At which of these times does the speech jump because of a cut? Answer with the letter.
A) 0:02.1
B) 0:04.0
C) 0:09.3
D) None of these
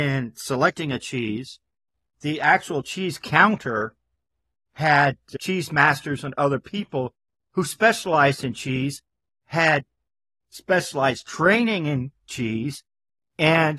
A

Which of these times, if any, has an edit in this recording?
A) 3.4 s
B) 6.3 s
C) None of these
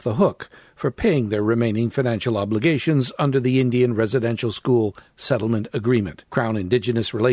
B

